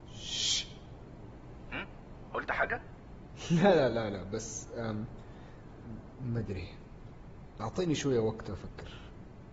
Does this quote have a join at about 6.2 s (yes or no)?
yes